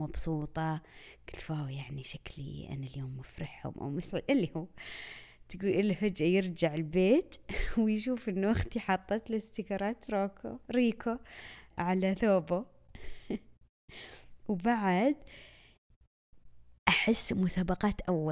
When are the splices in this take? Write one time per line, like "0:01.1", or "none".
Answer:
0:11.7
0:16.8